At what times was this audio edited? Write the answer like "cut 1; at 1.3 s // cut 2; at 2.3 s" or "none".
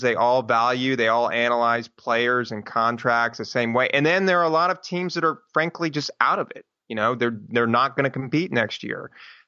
none